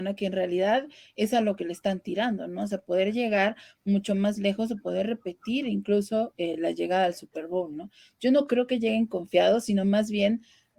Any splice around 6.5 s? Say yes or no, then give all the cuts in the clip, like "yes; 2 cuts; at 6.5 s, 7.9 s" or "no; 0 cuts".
no; 0 cuts